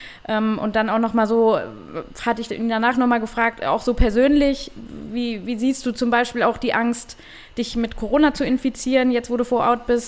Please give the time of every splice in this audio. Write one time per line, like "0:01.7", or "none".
none